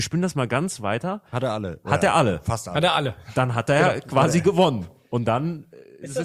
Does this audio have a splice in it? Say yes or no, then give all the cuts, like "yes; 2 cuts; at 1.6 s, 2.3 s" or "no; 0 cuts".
no; 0 cuts